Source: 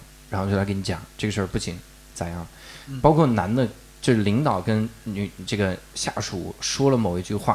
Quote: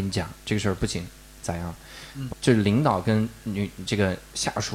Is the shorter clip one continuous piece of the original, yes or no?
no